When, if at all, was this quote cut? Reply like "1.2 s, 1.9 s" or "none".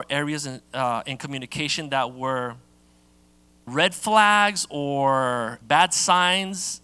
3.7 s, 5.6 s